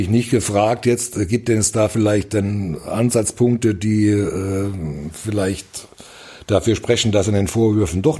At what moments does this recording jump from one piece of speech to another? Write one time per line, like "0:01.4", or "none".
none